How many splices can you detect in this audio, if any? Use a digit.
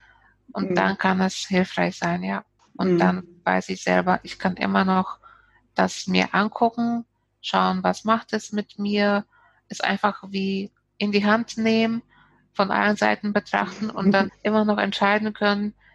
2